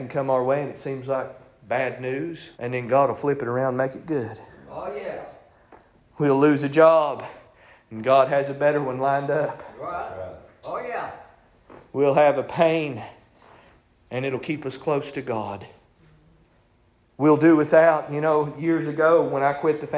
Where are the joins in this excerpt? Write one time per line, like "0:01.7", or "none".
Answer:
0:02.5
0:10.6